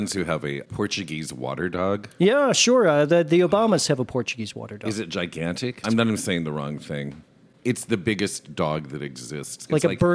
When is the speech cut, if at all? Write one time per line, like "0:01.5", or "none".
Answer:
0:05.8